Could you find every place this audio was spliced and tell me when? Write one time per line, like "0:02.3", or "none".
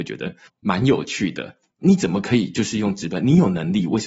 0:01.7